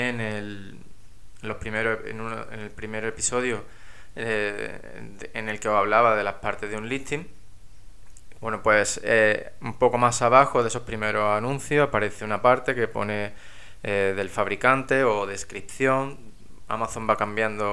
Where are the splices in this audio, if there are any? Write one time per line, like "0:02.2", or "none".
0:08.4